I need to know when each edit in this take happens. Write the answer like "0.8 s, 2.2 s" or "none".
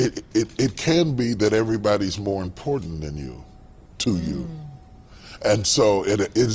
none